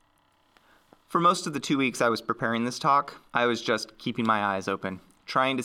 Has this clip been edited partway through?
yes; 1 cut; at 3.3 s

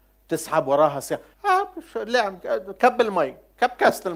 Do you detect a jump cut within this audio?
yes; 1 cut; at 1.3 s

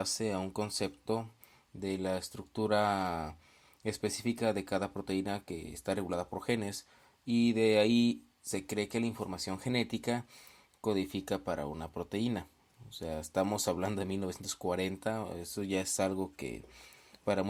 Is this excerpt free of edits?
yes; 0 cuts

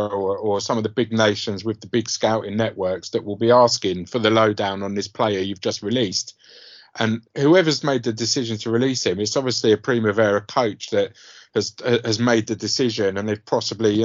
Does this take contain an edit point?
no; 0 cuts

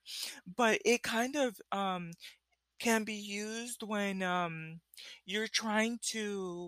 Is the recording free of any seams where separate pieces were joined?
yes; 0 cuts

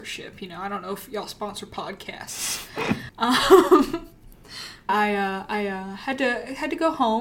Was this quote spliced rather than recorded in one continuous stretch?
yes; 2 cuts; at 3.1 s, 4.9 s

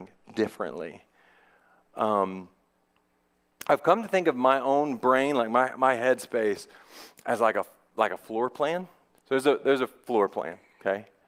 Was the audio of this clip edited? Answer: yes; 1 cut; at 9.2 s

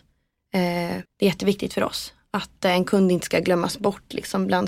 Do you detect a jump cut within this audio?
yes; 1 cut; at 1.0 s

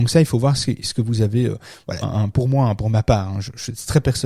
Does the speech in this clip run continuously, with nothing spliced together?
no; 1 cut; at 2.0 s

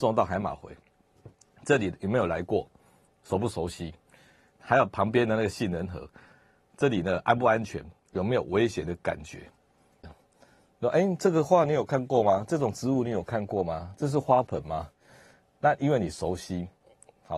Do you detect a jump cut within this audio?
yes; 1 cut; at 10.0 s

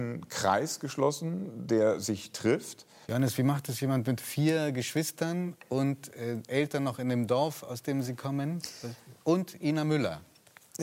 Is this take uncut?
no; 1 cut; at 3.0 s

